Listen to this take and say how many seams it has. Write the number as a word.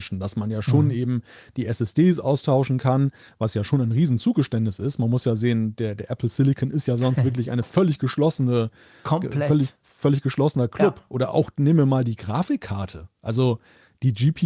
zero